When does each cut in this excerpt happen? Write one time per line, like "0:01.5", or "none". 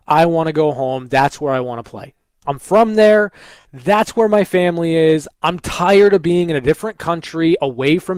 0:02.4
0:05.3